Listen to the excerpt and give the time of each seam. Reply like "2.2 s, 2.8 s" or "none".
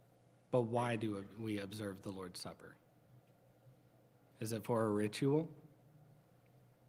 none